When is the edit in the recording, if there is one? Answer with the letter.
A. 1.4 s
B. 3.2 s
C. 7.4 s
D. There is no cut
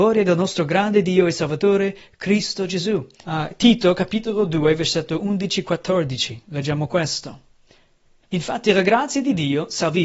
B